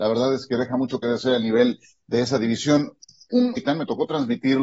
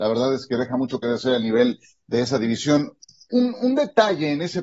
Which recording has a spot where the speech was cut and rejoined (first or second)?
first